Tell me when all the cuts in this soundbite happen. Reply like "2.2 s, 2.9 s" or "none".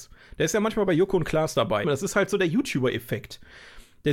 1.8 s